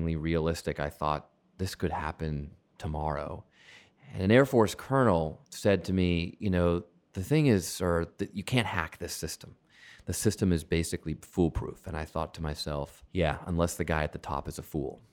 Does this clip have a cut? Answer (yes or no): yes